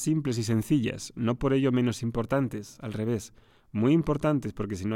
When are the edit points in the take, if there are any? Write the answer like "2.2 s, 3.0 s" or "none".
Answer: none